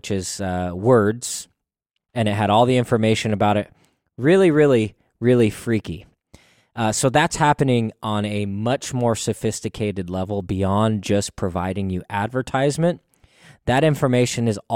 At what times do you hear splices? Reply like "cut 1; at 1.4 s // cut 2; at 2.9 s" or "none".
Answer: cut 1; at 2.1 s